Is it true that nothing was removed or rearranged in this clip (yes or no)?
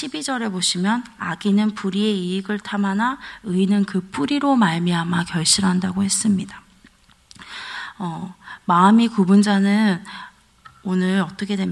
yes